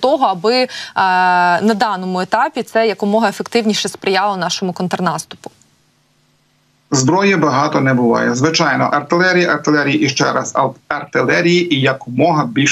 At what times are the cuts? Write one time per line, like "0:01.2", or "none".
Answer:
none